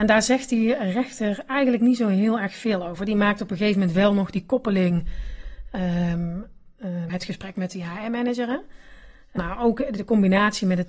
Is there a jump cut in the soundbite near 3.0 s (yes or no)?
no